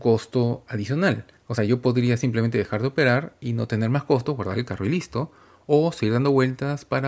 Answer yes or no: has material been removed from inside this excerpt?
no